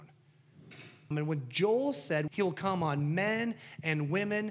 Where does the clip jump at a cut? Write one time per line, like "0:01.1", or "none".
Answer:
0:01.1
0:02.3